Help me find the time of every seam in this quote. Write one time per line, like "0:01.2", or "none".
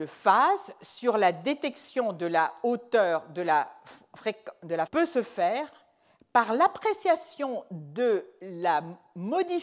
0:04.9